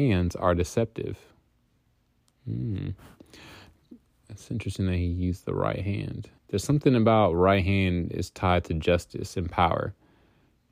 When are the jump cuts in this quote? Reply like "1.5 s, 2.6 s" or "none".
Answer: 6.4 s

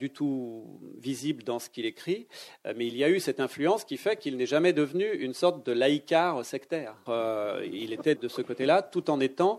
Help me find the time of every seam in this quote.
7.1 s, 8.2 s

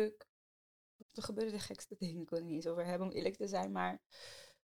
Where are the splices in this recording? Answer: 1.0 s

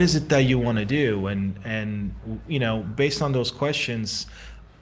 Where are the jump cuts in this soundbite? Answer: none

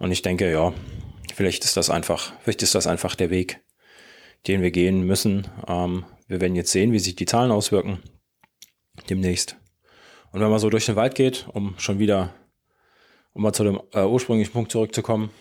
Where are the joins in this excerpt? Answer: none

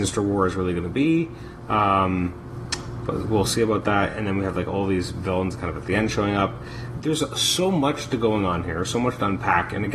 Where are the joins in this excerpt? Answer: none

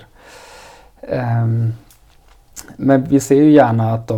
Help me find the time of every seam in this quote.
none

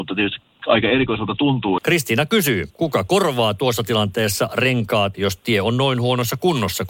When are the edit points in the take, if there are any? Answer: 1.8 s, 5.1 s

